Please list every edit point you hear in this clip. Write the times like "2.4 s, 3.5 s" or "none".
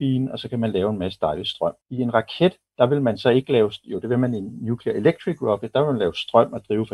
1.8 s